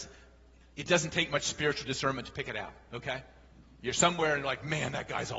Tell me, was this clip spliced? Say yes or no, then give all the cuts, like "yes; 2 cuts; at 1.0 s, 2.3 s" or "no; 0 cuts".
no; 0 cuts